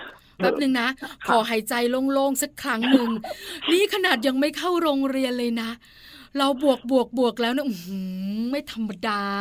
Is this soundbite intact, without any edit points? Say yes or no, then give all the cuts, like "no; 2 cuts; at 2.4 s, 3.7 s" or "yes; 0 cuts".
yes; 0 cuts